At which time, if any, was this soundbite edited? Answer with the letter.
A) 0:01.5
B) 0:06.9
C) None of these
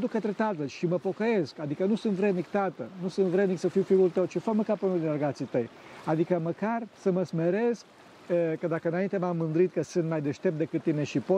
B